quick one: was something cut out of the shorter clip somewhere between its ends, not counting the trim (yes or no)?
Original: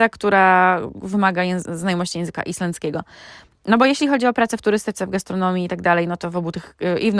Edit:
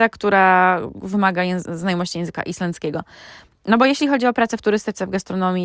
no